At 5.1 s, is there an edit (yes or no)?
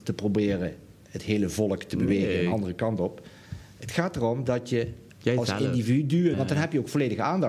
yes